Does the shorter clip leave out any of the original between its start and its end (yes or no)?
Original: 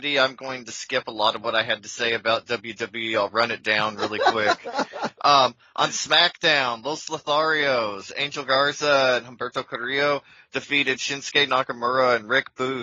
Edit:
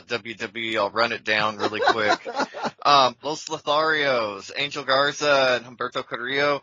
yes